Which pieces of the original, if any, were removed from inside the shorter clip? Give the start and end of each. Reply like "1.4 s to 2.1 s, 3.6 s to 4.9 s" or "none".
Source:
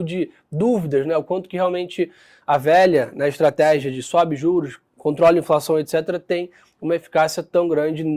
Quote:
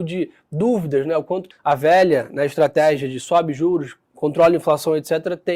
1.5 s to 2.3 s